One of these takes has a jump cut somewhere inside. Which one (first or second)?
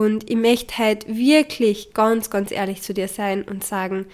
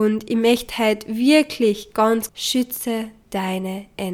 second